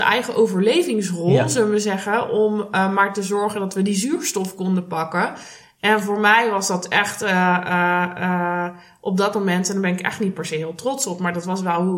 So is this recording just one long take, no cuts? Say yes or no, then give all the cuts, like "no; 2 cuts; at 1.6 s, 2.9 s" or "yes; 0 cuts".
yes; 0 cuts